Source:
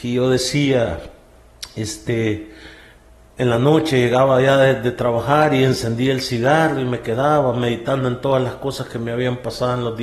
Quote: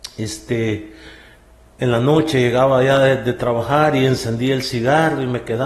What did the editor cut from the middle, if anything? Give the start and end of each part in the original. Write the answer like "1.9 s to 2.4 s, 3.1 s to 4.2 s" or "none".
none